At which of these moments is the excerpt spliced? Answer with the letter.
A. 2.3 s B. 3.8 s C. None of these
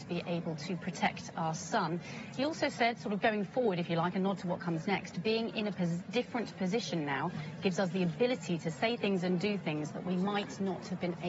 C